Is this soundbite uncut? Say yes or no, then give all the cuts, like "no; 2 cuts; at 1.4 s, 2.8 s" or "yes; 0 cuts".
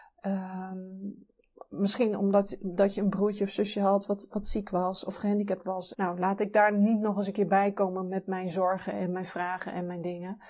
no; 1 cut; at 5.9 s